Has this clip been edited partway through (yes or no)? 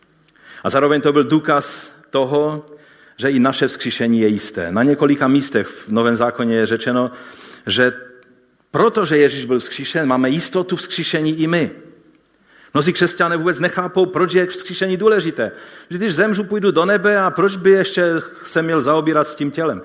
no